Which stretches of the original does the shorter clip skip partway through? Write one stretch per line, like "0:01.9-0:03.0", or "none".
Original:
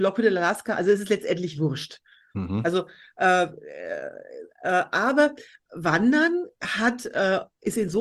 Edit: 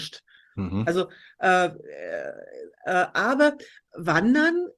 none